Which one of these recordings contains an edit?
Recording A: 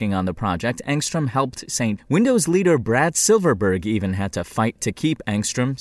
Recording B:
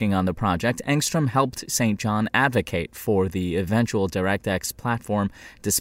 A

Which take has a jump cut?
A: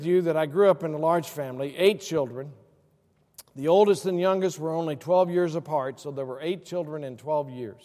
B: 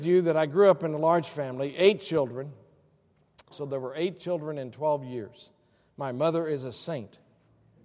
B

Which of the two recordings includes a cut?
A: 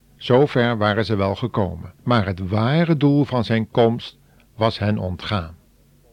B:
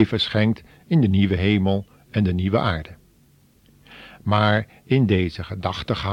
A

